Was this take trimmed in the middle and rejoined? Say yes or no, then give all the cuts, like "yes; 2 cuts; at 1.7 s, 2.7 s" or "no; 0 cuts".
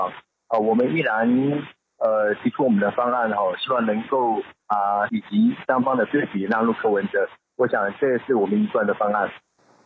yes; 1 cut; at 5.1 s